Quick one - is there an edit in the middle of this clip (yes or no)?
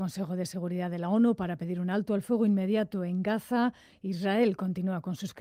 no